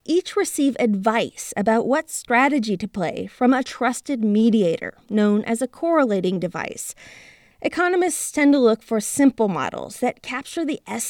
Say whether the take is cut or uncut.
cut